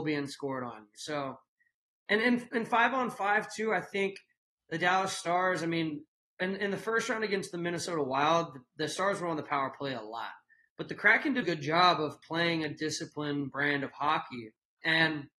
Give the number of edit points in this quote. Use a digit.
1